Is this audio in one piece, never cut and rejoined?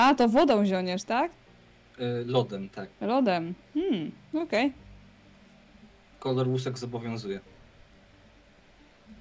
no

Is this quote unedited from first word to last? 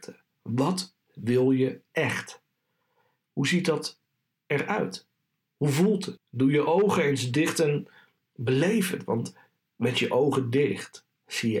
no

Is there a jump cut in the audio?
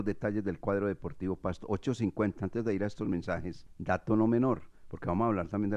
no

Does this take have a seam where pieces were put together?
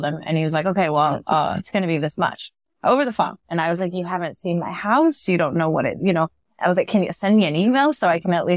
yes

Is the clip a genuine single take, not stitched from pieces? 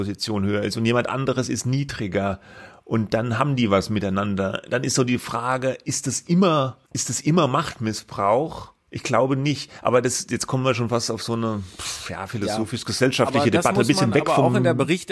no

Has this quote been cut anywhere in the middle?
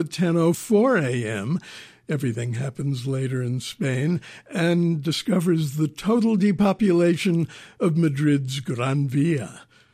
no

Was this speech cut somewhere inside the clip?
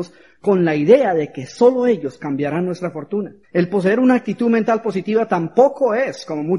yes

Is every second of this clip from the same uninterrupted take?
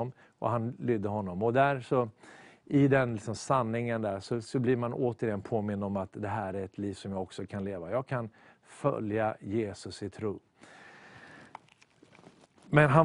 yes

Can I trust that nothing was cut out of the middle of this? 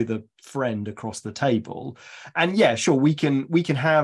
yes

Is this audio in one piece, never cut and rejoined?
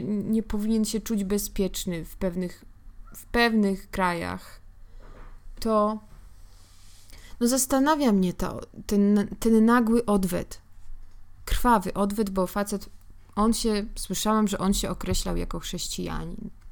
yes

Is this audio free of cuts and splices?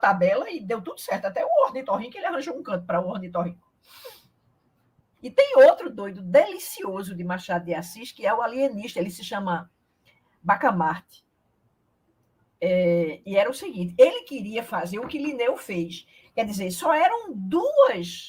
no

